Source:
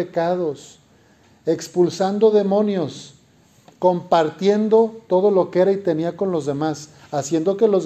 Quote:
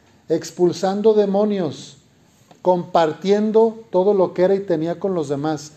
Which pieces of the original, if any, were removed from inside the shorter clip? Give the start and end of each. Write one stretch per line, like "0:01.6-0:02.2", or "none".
none